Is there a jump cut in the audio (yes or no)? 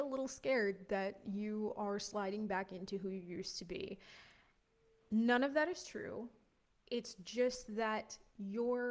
no